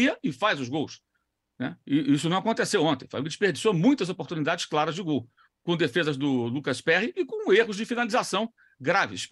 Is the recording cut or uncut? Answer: uncut